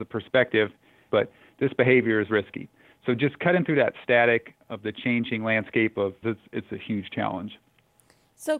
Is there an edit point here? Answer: yes; 2 cuts; at 1.1 s, 6.2 s

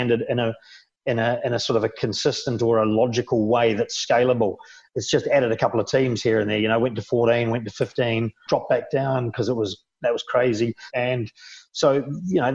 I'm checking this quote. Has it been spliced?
yes; 2 cuts; at 8.5 s, 10.9 s

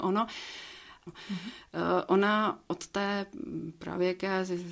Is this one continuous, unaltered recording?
no; 1 cut; at 1.1 s

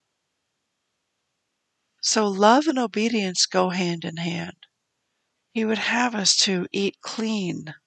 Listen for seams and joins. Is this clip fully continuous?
no; 2 cuts; at 2.0 s, 5.4 s

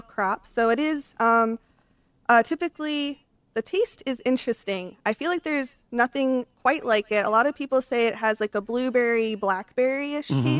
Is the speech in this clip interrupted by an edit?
no; 0 cuts

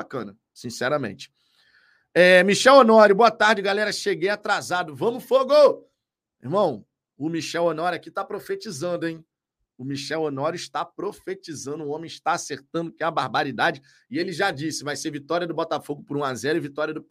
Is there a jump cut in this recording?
no; 0 cuts

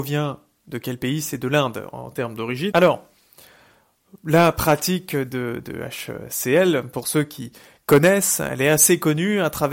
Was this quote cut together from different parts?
yes; 1 cut; at 2.7 s

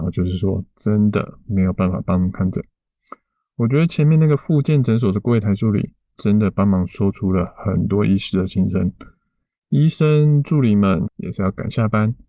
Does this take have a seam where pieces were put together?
yes; 1 cut; at 11.1 s

